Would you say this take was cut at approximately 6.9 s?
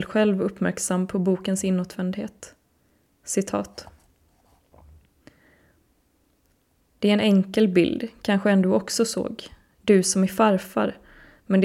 yes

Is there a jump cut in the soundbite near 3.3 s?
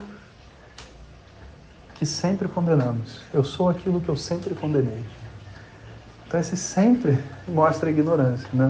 no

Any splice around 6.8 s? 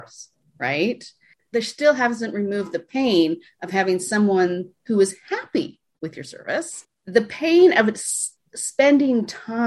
yes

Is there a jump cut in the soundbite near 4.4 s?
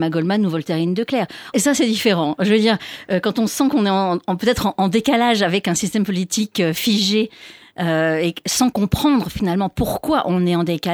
no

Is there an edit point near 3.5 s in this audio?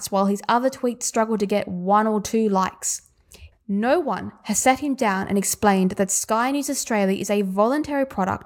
yes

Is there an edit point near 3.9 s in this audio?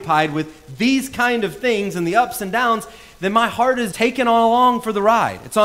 yes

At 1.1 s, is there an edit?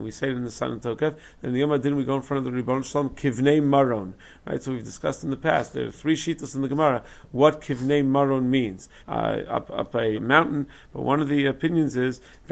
no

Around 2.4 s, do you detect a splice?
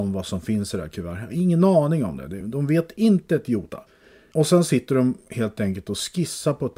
no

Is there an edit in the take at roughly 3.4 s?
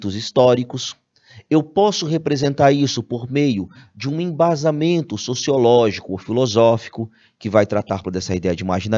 no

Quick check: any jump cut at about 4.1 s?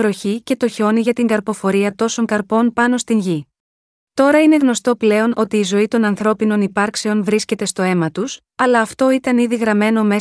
yes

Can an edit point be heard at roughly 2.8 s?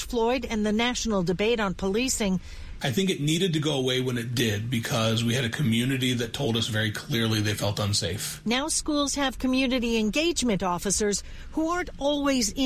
yes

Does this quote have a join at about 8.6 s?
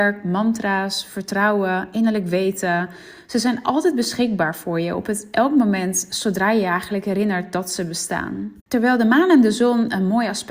yes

